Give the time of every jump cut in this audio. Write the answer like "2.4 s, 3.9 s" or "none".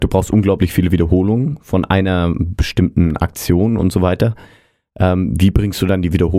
none